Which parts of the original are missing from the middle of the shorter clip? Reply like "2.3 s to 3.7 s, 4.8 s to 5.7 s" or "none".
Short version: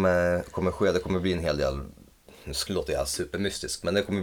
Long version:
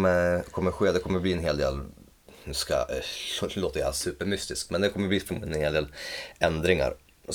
2.7 s to 3.5 s